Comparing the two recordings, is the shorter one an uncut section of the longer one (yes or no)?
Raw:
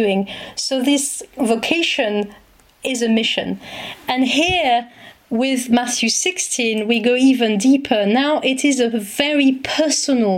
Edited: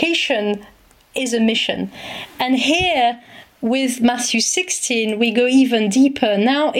yes